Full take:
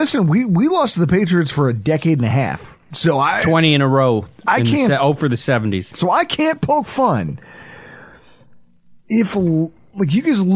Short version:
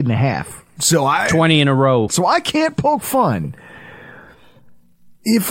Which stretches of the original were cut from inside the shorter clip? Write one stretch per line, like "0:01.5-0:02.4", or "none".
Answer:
0:04.2-0:05.9